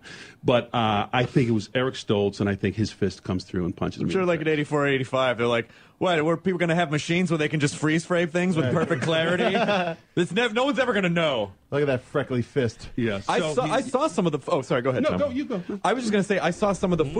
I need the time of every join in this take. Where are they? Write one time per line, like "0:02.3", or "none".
none